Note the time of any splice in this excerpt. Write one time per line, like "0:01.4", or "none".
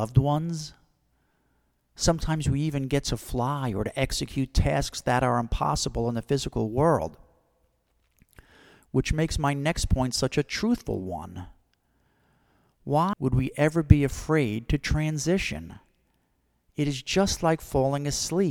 0:13.1